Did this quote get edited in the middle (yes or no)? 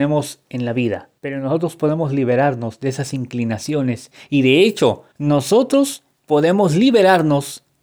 yes